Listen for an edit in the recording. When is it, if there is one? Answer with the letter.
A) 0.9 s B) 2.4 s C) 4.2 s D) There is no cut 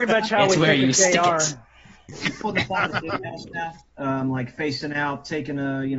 D